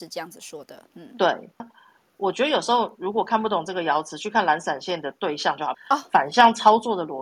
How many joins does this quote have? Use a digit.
2